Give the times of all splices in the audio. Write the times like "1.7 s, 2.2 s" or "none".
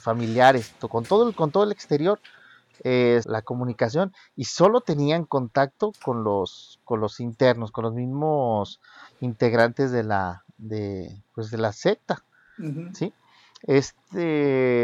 3.2 s